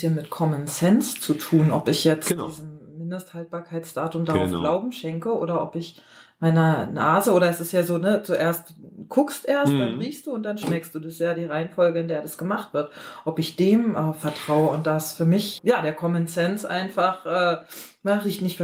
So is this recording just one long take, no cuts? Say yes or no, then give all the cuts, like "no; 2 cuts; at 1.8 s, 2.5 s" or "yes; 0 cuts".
no; 1 cut; at 15.6 s